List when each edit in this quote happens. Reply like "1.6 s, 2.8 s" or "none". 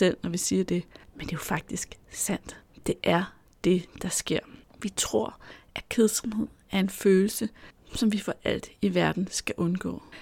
none